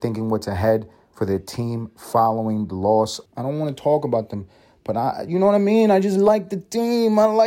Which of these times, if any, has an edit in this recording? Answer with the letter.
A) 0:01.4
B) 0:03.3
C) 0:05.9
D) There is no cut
B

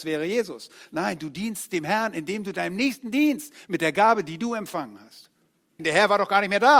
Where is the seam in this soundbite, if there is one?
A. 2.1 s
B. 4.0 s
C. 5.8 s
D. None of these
C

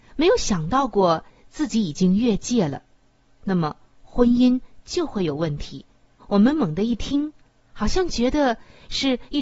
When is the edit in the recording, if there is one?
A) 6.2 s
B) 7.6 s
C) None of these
A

